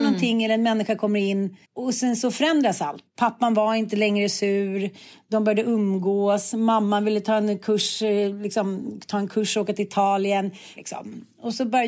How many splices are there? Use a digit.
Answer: 3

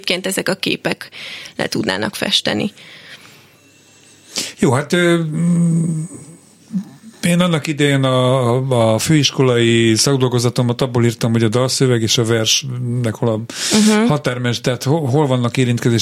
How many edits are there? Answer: 0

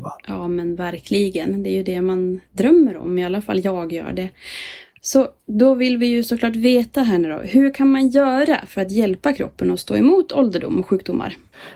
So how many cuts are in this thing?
0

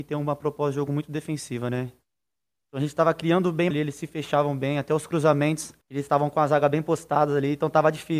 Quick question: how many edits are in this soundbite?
2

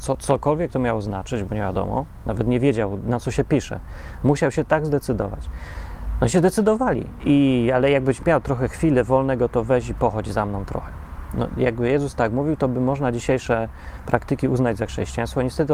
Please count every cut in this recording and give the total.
1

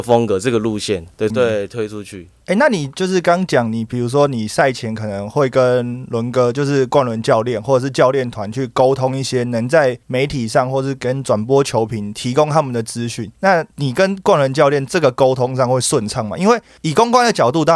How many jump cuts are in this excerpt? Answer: 1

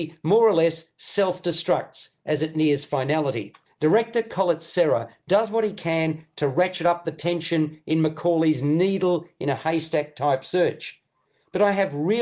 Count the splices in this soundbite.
1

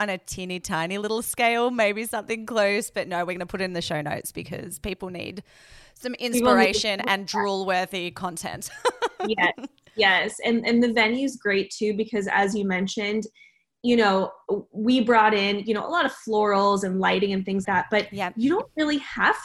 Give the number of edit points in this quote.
1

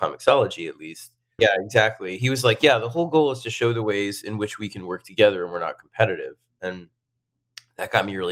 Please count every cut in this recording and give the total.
1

